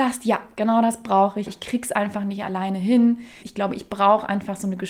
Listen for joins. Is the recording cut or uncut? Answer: cut